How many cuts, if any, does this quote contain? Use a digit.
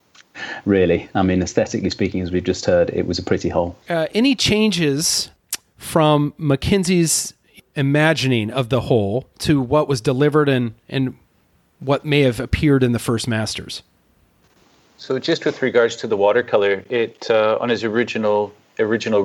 1